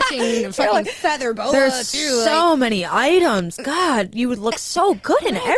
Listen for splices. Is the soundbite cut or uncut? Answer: uncut